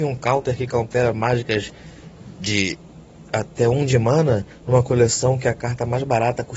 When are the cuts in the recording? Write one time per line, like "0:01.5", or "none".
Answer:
none